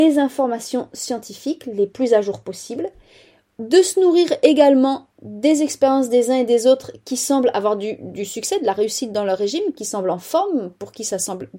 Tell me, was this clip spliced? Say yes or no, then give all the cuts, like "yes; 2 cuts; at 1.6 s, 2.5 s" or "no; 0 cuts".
no; 0 cuts